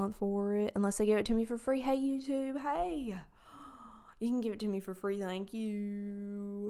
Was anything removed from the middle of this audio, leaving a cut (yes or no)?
no